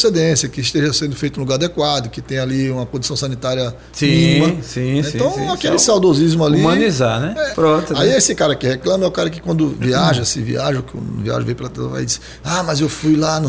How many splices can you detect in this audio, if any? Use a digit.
1